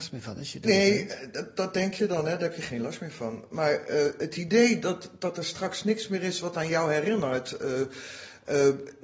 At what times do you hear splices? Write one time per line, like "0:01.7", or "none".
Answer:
none